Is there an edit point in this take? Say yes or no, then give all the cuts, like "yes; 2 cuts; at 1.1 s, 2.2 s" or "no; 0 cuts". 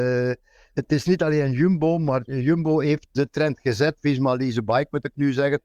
no; 0 cuts